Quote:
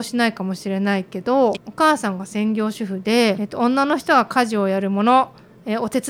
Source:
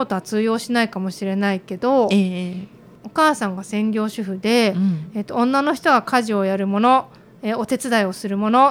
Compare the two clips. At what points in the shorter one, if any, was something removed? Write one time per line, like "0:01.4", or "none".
0:01.5
0:03.4